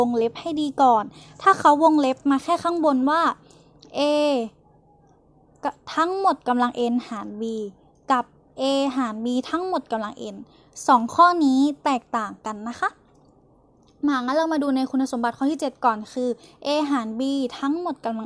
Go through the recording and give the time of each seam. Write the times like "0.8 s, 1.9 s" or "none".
none